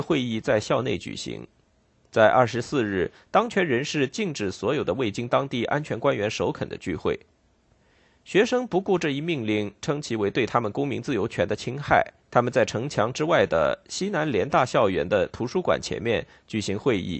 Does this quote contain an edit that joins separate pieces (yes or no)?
yes